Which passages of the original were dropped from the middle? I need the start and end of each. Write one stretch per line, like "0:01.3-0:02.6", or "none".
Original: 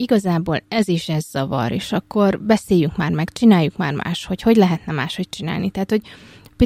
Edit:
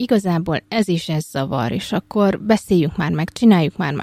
none